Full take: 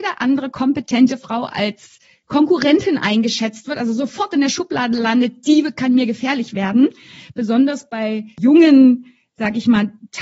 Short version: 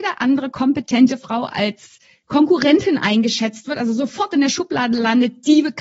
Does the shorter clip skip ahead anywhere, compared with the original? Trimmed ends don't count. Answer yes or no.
no